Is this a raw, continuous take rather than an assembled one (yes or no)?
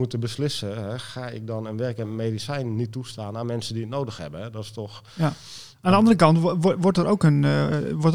yes